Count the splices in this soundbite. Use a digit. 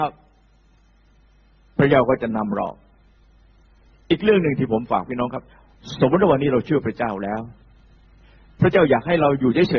0